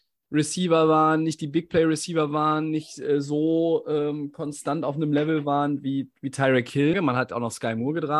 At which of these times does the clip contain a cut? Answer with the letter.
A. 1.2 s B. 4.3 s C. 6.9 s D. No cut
C